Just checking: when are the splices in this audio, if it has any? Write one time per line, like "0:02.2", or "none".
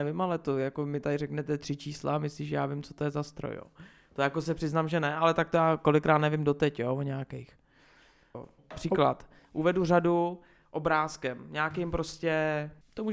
0:08.3